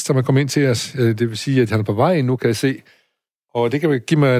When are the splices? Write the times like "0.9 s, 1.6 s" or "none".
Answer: none